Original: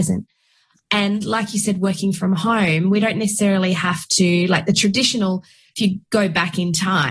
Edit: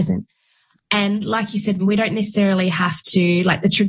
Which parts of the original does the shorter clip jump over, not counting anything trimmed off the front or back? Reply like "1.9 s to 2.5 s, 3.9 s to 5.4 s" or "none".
1.8 s to 2.8 s